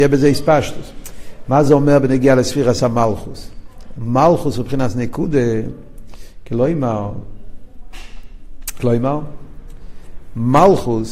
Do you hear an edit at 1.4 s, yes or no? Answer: no